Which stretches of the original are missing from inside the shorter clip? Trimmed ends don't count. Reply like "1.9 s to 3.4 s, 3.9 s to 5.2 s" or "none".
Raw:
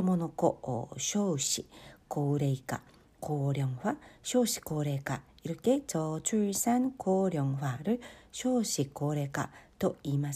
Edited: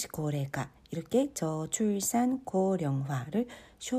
none